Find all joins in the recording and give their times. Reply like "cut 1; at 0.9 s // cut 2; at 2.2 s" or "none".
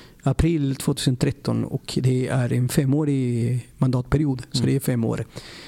none